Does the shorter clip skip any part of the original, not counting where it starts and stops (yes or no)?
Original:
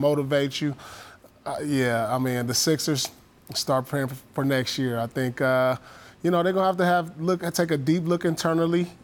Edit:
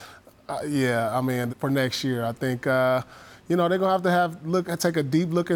yes